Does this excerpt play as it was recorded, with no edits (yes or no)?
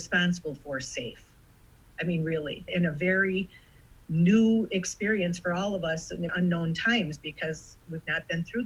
no